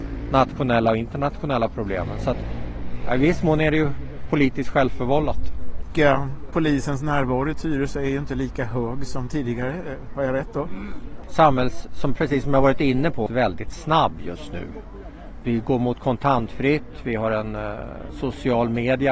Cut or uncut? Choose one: cut